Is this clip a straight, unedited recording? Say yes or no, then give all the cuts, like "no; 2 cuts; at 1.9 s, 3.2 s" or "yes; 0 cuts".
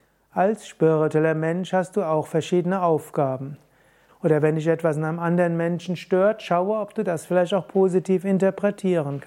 no; 1 cut; at 4.1 s